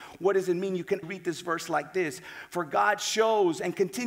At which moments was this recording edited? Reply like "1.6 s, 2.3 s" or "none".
1.0 s